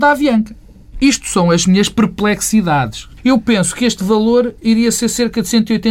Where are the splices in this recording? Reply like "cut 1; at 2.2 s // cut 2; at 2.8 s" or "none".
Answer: cut 1; at 0.9 s // cut 2; at 3.2 s